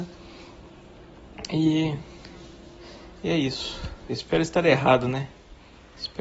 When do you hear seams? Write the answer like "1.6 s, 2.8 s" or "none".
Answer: 4.1 s

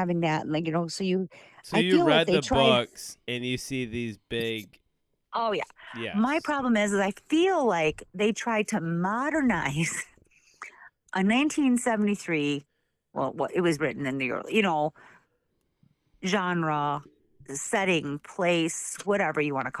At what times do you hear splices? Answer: none

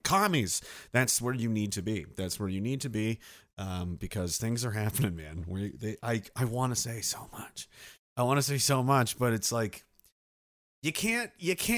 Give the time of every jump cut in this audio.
none

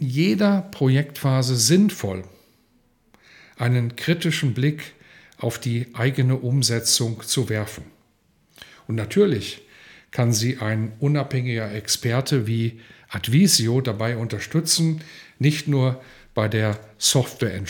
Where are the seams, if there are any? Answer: none

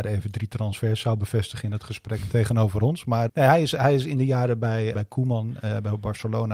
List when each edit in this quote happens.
3.3 s, 4.9 s

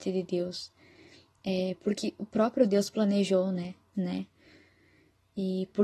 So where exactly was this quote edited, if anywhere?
3.9 s

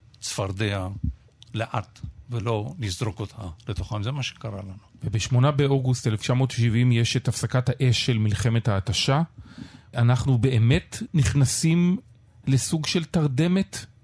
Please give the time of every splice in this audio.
9.9 s

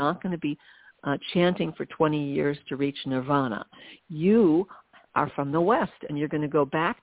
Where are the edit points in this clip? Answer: none

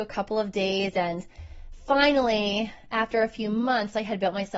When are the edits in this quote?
none

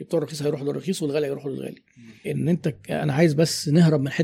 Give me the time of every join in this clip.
2.2 s

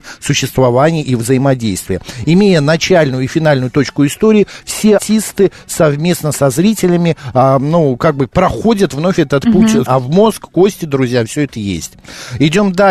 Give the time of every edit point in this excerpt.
5.0 s, 9.9 s

